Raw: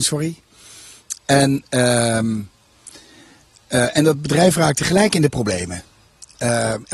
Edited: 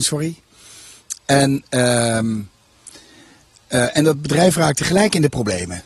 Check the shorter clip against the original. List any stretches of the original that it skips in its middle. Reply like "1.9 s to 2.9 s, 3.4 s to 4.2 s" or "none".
none